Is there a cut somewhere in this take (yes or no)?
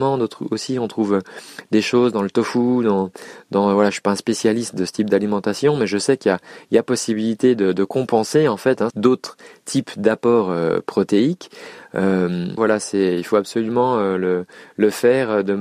yes